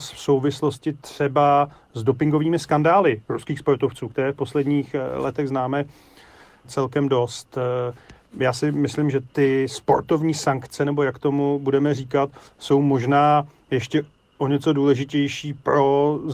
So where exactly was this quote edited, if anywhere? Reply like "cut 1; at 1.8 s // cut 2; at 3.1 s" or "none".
none